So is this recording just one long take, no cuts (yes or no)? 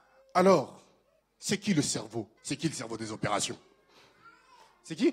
no